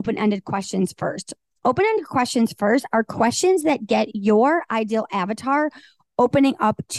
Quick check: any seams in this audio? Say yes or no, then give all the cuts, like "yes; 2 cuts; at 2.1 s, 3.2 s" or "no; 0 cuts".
no; 0 cuts